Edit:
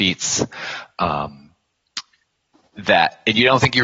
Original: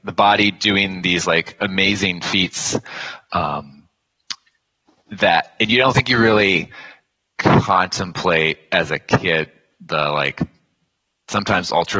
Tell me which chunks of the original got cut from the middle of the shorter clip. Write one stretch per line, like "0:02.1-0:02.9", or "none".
none